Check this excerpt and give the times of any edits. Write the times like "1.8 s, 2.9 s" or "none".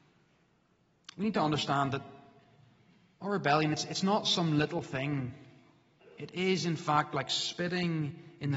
none